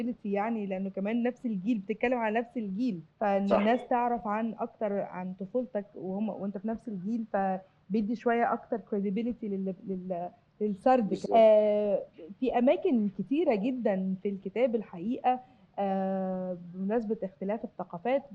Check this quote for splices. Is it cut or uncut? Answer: cut